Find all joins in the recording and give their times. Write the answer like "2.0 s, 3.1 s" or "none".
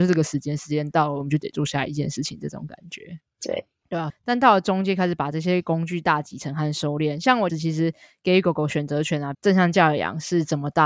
4.1 s, 7.5 s, 9.3 s

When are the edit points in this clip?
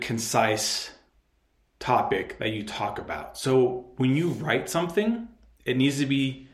none

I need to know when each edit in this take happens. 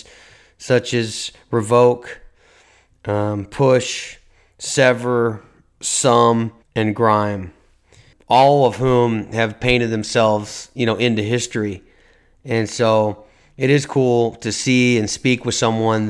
6.6 s

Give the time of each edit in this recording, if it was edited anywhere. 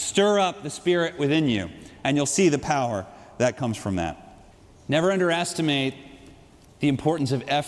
none

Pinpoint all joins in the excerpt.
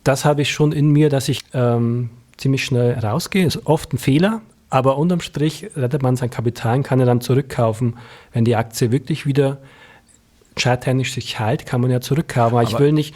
1.4 s

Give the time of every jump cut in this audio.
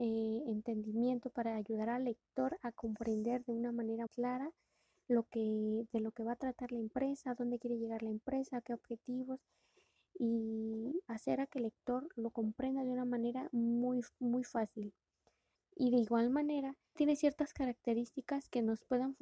4.1 s, 15.6 s, 17.0 s

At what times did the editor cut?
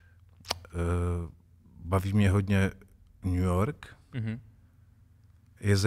none

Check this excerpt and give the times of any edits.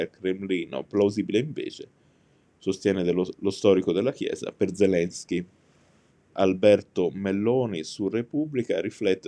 6.3 s

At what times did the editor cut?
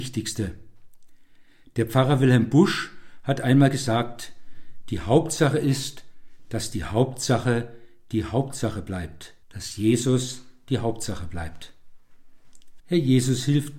9.4 s, 12.8 s

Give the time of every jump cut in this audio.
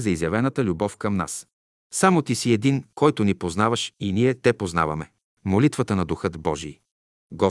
5.3 s

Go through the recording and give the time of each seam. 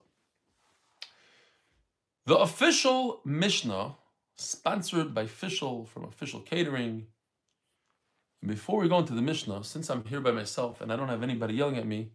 none

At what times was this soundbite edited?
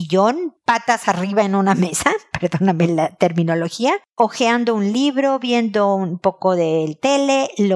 none

